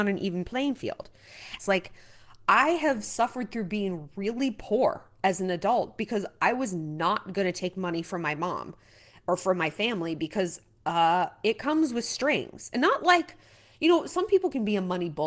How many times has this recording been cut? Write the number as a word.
one